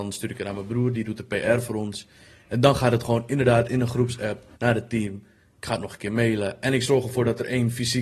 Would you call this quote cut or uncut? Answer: cut